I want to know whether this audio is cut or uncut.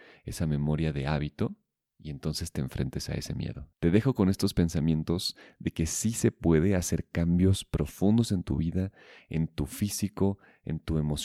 cut